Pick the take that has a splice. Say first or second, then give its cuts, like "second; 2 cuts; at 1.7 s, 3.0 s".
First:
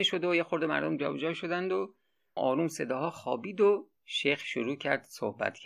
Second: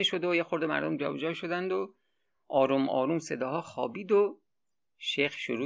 first; 2 cuts; at 2.4 s, 4.0 s